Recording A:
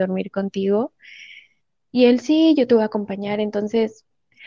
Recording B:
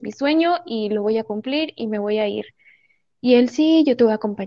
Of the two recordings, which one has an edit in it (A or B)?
A